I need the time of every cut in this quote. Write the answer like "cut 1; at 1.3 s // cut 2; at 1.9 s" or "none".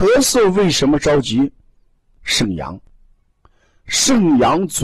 cut 1; at 2.2 s

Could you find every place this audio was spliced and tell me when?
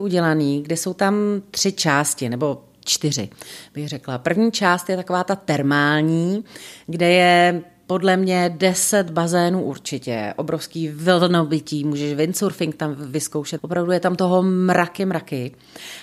cut 1; at 13.6 s // cut 2; at 15.0 s

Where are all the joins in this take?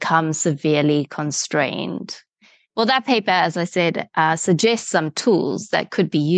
cut 1; at 2.7 s

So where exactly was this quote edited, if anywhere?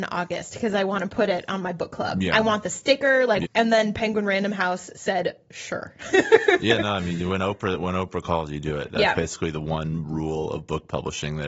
cut 1; at 3.4 s

